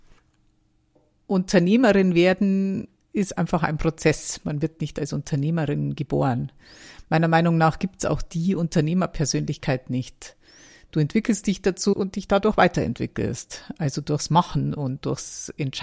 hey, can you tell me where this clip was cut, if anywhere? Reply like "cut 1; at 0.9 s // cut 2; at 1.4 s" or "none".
cut 1; at 11.9 s